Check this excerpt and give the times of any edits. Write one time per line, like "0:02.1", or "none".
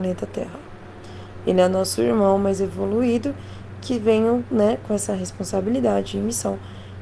none